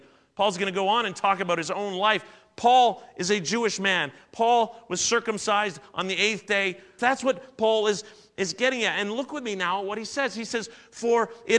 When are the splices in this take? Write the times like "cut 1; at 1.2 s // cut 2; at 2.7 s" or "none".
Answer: cut 1; at 7.0 s

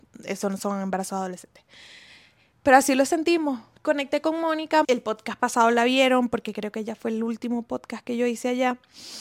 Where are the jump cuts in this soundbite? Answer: cut 1; at 4.8 s

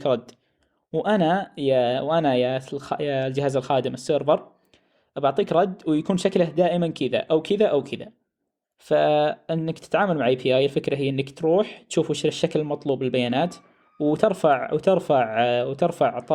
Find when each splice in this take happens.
none

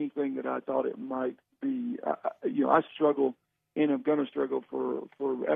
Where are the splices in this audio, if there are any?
cut 1; at 2.9 s

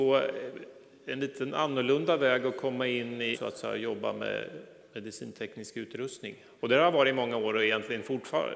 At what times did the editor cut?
cut 1; at 3.3 s // cut 2; at 6.6 s

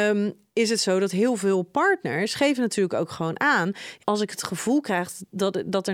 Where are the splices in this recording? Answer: cut 1; at 4.0 s

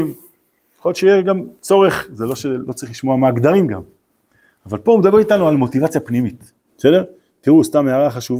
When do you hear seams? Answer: cut 1; at 6.7 s

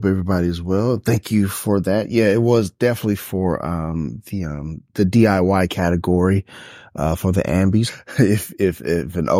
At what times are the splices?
cut 1; at 7.9 s

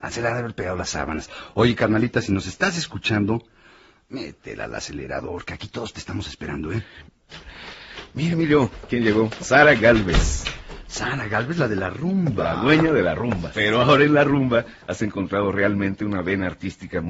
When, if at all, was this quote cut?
cut 1; at 13.5 s

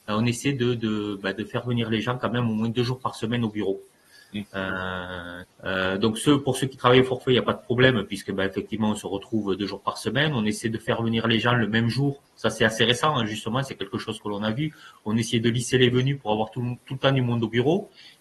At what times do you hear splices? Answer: cut 1; at 5.4 s

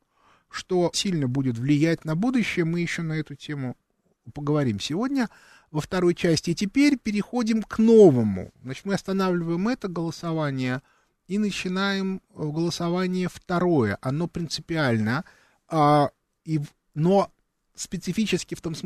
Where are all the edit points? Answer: cut 1; at 0.9 s

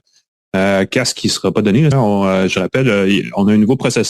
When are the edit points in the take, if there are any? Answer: cut 1; at 1.9 s

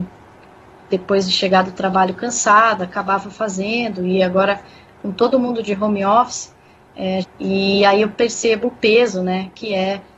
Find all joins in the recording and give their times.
cut 1; at 7.2 s

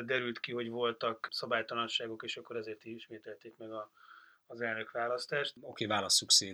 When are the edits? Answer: none

